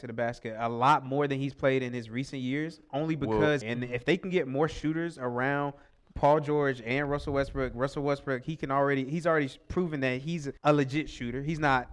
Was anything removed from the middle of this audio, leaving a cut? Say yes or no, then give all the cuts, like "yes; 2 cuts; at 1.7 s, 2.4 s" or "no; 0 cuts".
yes; 2 cuts; at 3.6 s, 10.6 s